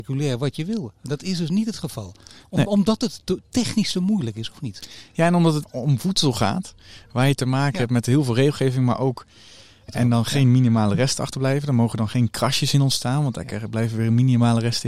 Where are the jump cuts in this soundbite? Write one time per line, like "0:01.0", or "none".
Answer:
0:05.6
0:09.9